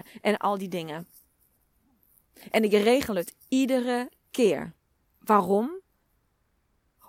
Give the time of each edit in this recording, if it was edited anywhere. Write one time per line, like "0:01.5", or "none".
0:05.0

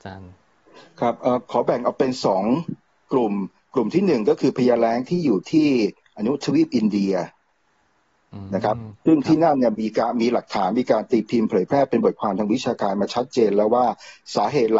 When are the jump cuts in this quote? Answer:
0:01.4

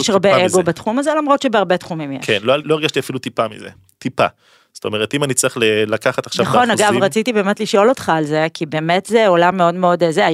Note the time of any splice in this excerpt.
0:02.6

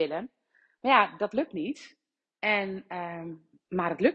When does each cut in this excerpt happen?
none

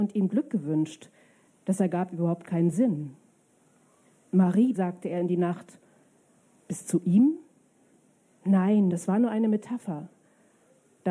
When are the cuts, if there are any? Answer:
0:04.7
0:06.6
0:08.9

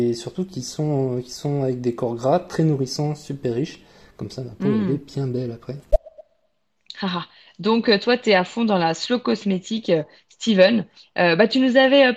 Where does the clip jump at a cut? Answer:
none

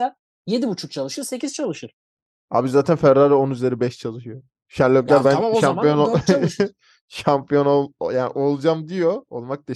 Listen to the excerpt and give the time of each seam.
none

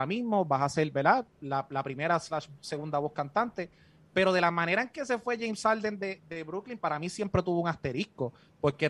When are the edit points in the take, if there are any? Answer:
none

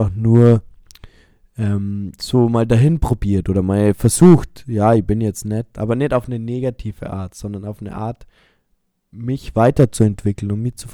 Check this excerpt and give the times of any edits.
0:05.7

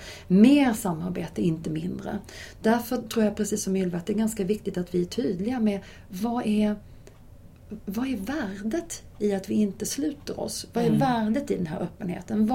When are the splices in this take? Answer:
none

